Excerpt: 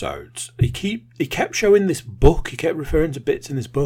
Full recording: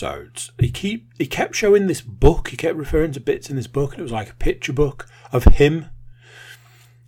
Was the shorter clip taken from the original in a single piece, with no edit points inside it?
yes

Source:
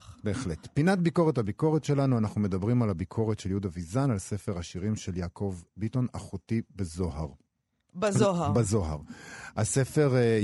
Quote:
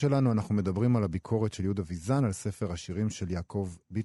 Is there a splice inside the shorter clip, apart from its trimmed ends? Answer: no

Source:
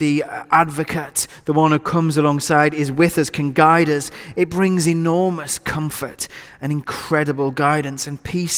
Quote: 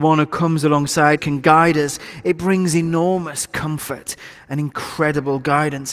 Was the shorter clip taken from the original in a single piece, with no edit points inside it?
no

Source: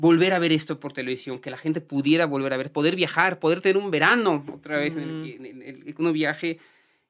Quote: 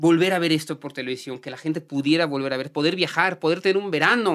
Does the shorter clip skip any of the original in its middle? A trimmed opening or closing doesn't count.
no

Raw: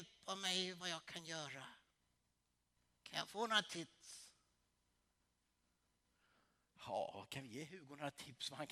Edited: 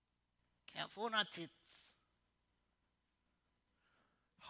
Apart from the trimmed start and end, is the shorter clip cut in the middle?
no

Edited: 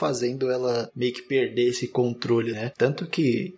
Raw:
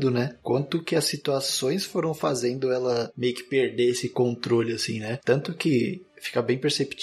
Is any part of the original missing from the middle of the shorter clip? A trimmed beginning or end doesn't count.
yes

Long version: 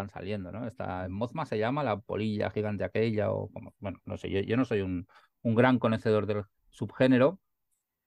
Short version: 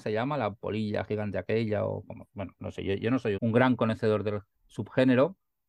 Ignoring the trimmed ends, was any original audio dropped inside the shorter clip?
yes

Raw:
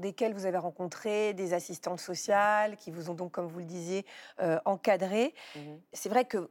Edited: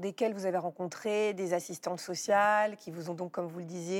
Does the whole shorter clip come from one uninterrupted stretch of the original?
yes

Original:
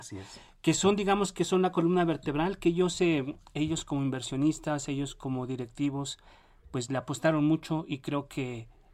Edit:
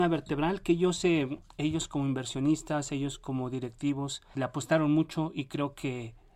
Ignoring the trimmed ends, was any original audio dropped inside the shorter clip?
yes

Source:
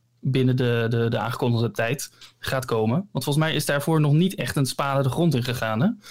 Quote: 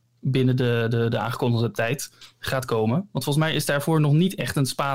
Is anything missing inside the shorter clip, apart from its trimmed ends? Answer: no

